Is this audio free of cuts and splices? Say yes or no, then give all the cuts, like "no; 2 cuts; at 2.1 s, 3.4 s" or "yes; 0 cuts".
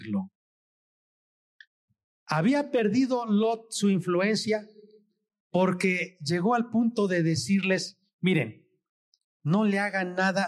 yes; 0 cuts